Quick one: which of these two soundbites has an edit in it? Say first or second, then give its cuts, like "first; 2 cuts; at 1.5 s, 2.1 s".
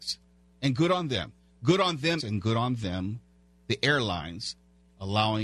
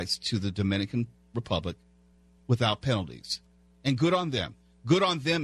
first; 1 cut; at 2.2 s